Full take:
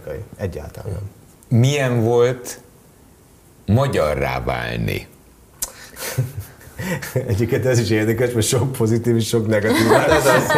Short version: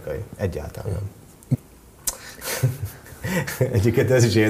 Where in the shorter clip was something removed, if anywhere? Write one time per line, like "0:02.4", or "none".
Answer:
0:01.5